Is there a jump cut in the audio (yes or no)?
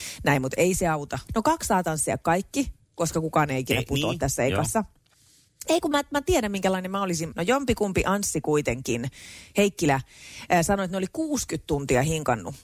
yes